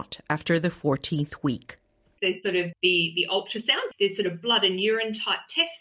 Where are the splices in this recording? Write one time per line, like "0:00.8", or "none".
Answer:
0:02.2